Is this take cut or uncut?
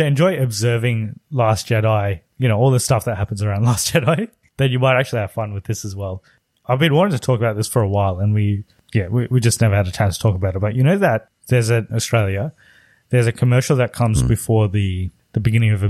cut